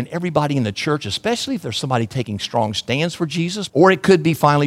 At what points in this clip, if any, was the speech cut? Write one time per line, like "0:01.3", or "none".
0:03.7